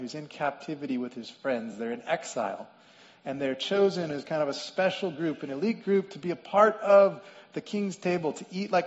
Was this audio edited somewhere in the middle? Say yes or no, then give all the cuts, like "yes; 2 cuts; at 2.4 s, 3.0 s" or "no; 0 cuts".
no; 0 cuts